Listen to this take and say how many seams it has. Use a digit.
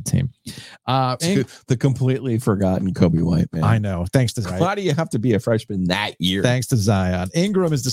2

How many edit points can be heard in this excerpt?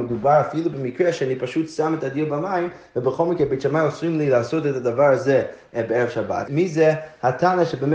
1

